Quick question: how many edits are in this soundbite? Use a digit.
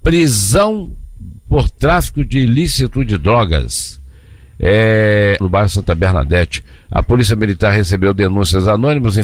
1